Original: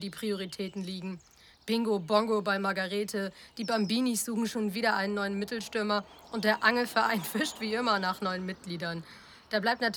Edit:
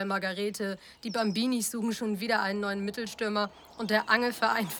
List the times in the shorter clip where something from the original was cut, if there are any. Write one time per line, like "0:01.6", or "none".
none

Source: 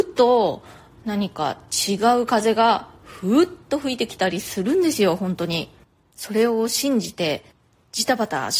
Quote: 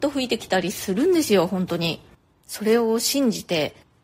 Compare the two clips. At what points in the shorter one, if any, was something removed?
none

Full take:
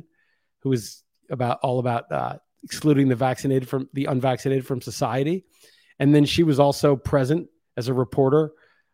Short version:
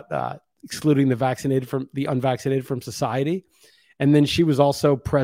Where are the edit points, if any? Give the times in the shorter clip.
none

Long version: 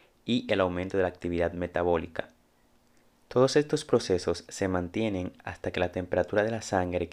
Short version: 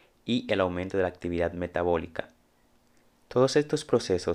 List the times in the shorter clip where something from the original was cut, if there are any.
none

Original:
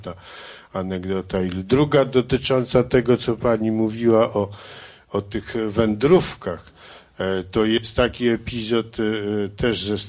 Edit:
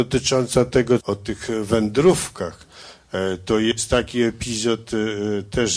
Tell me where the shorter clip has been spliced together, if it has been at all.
0:01.0

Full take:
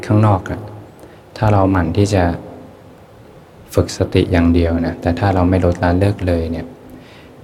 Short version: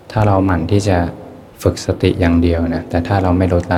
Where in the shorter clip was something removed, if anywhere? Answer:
0:01.5

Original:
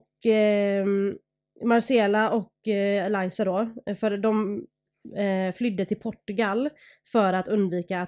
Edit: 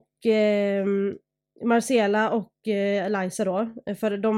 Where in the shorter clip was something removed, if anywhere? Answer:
none

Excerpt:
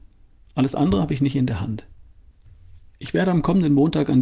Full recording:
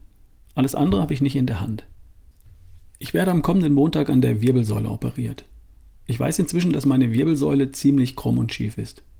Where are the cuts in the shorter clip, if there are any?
none

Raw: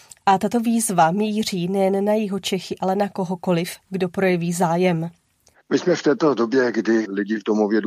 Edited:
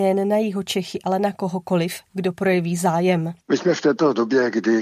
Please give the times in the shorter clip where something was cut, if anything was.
0:03.4

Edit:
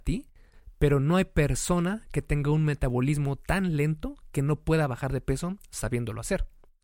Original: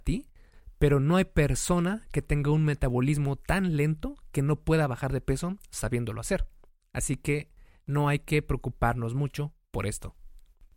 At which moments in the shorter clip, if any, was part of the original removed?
none

